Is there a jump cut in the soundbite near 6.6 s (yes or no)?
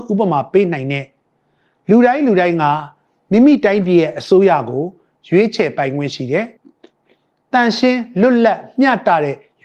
yes